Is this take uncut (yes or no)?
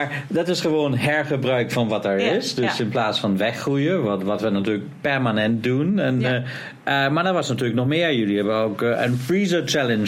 yes